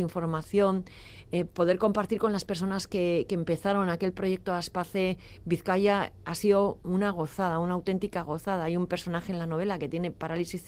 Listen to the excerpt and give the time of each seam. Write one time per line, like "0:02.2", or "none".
none